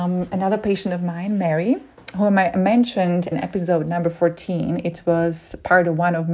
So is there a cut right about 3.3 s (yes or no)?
yes